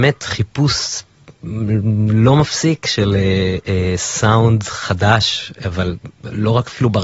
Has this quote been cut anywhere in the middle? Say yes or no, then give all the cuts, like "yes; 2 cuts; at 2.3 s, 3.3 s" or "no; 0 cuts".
no; 0 cuts